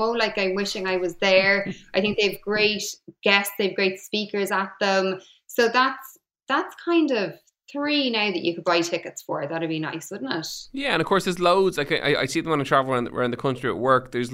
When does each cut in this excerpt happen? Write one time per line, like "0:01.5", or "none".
none